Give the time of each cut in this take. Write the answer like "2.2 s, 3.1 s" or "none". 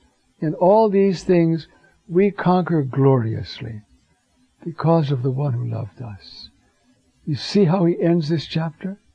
none